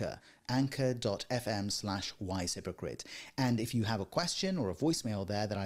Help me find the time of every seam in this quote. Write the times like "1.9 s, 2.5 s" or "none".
none